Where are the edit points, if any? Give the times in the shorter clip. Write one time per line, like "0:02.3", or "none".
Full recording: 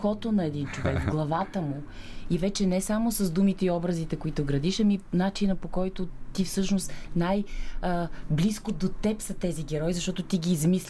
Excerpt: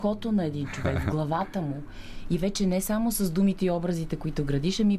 none